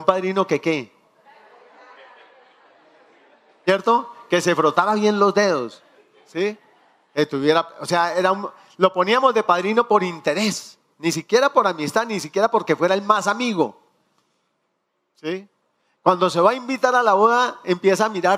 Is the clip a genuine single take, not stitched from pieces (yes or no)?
yes